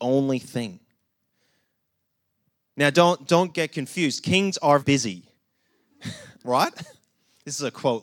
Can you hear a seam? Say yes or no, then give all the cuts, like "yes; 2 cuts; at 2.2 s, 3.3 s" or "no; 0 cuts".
yes; 1 cut; at 4.8 s